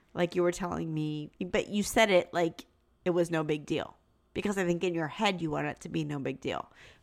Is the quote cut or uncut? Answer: cut